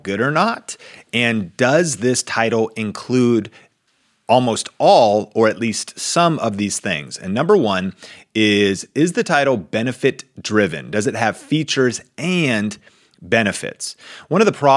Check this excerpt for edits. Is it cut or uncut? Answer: uncut